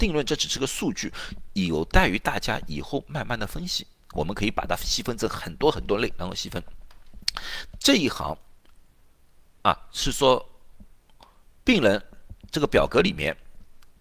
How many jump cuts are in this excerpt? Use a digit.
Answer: 1